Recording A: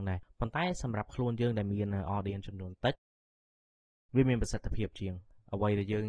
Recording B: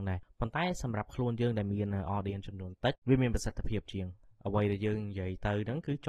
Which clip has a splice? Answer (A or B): B